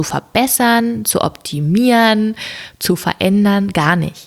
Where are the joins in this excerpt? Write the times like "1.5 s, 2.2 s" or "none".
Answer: none